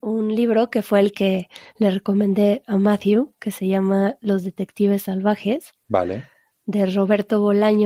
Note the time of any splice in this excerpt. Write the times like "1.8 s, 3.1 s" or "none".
none